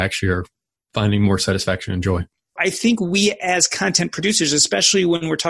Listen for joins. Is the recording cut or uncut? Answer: cut